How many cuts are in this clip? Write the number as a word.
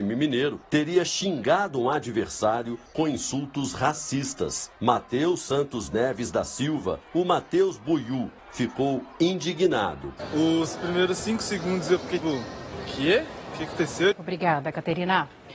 three